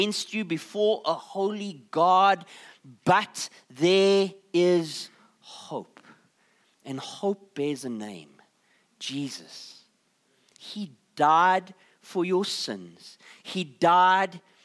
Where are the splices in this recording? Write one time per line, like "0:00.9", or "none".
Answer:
none